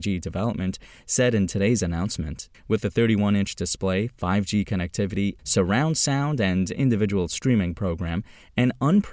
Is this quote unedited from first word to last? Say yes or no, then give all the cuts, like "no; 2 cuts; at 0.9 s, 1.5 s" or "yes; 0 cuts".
no; 2 cuts; at 2.5 s, 5.4 s